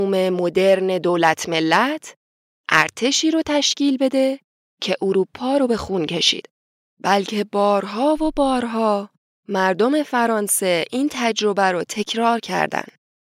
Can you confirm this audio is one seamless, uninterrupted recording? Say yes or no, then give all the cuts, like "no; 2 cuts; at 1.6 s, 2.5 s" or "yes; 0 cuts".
no; 1 cut; at 6.9 s